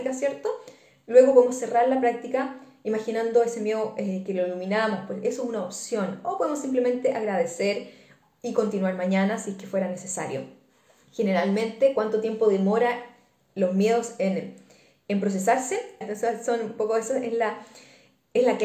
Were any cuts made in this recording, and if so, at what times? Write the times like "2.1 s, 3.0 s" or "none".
16.0 s